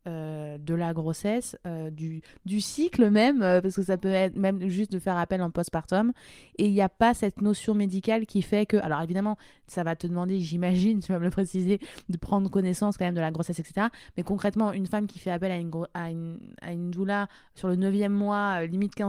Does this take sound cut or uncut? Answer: uncut